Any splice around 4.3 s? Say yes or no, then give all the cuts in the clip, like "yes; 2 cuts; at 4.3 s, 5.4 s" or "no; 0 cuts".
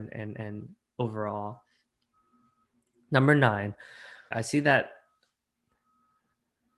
yes; 1 cut; at 4.3 s